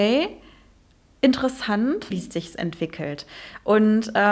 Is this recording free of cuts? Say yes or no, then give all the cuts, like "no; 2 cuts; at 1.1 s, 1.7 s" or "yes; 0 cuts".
no; 1 cut; at 2.1 s